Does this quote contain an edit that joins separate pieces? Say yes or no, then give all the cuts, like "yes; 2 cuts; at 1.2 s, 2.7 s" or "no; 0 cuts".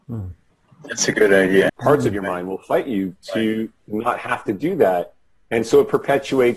yes; 1 cut; at 1.7 s